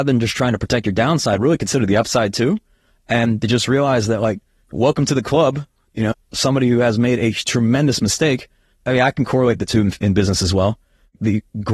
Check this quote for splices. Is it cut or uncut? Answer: cut